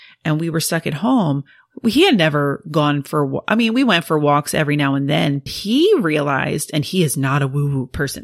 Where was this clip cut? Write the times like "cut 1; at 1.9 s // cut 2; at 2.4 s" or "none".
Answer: cut 1; at 5.5 s